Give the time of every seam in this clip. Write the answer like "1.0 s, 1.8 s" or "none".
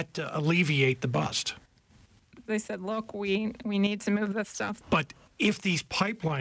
2.5 s, 4.8 s